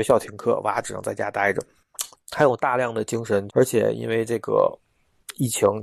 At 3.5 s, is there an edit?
yes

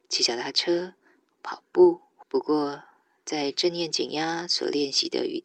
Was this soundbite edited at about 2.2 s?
yes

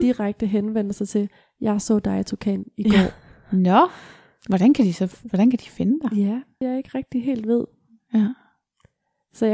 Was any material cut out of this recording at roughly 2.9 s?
no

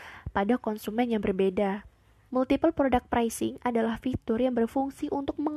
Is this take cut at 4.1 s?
no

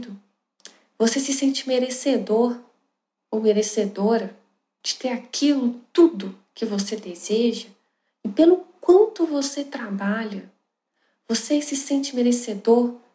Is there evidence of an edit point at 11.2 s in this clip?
no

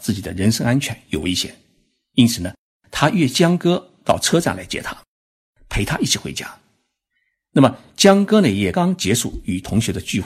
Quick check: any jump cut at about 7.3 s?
no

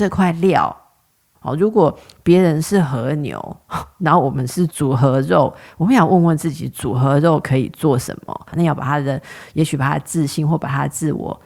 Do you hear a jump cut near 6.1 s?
no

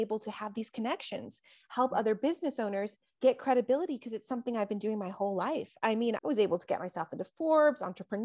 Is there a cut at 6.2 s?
yes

